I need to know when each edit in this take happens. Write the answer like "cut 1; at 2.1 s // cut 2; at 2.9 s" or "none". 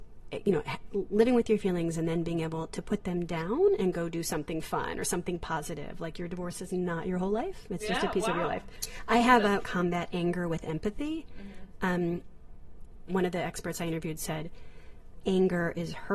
cut 1; at 9.6 s // cut 2; at 13.1 s